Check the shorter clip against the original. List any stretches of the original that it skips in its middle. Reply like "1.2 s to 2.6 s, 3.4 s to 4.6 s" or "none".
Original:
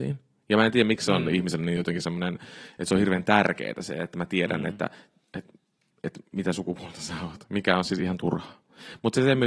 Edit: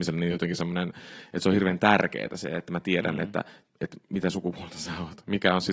5.1 s to 5.9 s